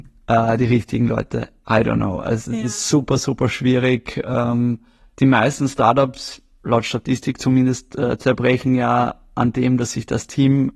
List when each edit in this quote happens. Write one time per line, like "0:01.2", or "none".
none